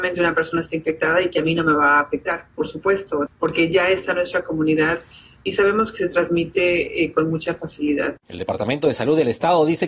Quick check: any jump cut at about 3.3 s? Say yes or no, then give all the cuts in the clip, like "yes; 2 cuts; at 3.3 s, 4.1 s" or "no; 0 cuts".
yes; 1 cut; at 3.3 s